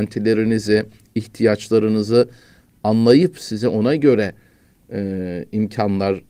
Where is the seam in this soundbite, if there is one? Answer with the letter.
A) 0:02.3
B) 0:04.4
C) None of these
C